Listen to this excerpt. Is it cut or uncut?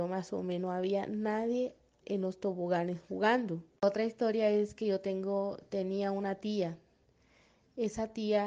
cut